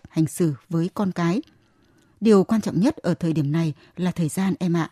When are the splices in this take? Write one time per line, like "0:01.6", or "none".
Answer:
none

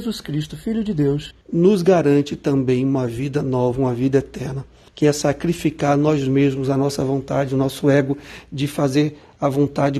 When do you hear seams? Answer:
0:01.4
0:04.9

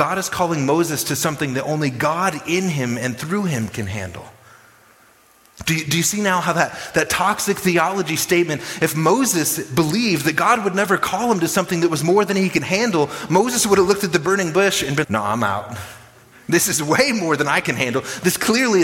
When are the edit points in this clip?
0:15.0

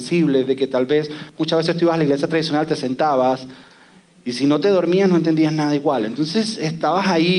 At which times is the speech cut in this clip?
none

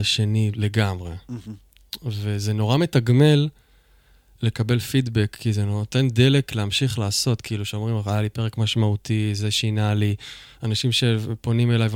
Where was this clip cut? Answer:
none

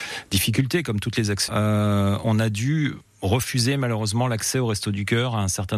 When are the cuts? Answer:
0:01.5

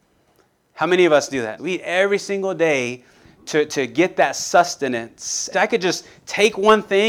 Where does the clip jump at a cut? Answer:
0:01.6
0:05.5

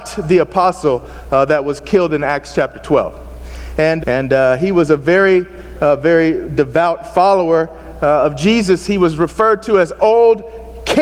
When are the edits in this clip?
0:04.0

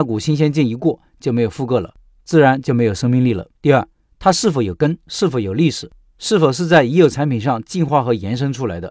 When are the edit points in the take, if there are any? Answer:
0:03.6

